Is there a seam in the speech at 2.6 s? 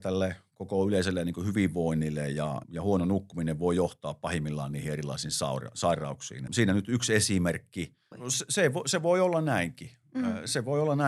yes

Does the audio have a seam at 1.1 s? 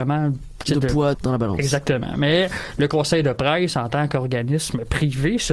yes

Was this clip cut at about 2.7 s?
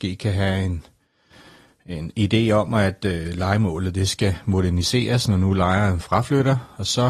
no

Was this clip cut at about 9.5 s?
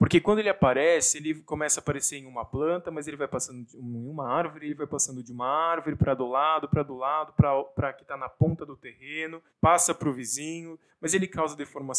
yes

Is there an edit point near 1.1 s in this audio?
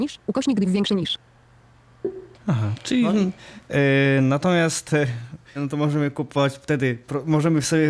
no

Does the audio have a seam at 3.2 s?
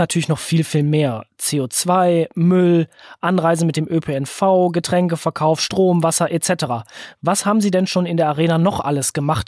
no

